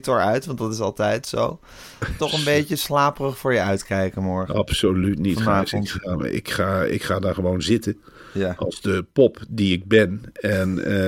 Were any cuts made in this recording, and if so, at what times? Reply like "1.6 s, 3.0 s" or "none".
2.2 s